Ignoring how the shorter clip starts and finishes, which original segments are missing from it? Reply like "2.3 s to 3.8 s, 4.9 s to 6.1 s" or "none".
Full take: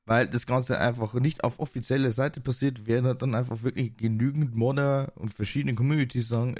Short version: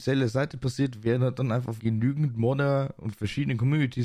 3.6 s to 4.0 s